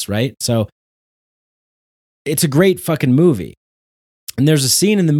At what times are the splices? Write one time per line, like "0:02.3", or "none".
none